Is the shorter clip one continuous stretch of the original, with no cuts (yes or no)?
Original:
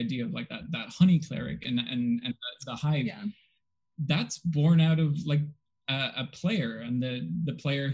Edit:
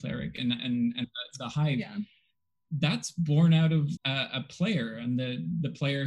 no